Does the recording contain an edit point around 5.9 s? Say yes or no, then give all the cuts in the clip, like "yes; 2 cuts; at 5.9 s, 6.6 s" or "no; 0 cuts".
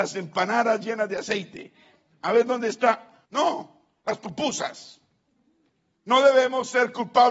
yes; 2 cuts; at 3.3 s, 5.9 s